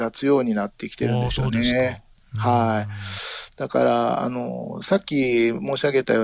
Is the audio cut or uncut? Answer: uncut